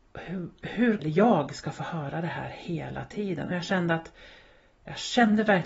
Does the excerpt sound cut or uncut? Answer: cut